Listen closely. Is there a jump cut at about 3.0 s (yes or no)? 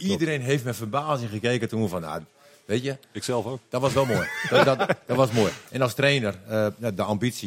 no